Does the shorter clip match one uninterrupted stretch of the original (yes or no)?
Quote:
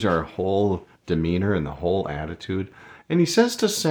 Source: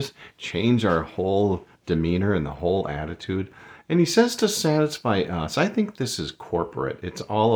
yes